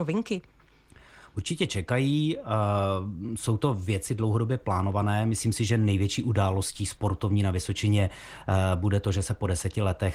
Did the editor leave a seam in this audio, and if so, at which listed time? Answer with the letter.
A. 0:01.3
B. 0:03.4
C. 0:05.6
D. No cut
D